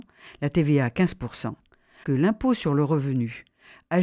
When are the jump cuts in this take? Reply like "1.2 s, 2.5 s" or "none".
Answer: 2.0 s